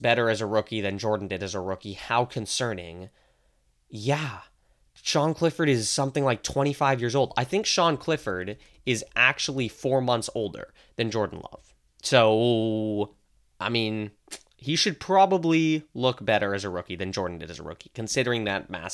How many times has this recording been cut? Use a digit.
0